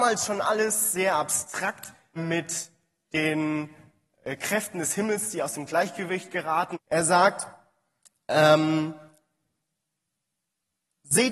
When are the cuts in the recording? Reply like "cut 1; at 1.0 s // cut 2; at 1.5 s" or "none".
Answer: cut 1; at 2.2 s // cut 2; at 6.7 s